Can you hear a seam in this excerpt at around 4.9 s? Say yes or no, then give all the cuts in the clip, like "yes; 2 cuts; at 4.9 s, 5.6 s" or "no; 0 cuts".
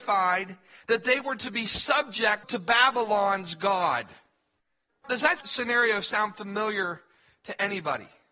yes; 1 cut; at 4.9 s